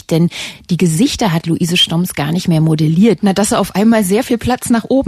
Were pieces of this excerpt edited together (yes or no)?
yes